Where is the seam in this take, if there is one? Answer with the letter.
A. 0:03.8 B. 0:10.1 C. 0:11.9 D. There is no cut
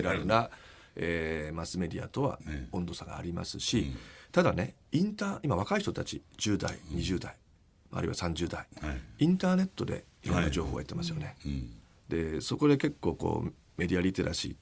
B